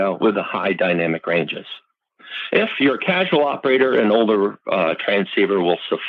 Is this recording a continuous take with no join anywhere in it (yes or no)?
yes